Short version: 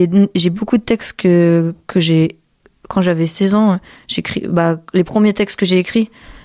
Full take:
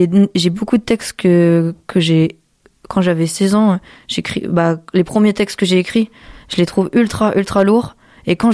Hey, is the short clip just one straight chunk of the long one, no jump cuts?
yes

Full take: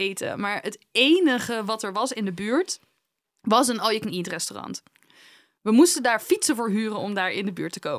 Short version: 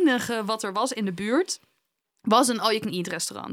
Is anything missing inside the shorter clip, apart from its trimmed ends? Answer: no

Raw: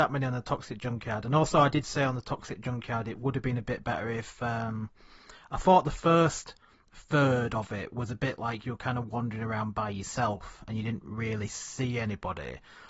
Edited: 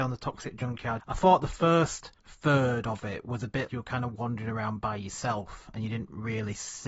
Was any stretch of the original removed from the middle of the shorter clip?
yes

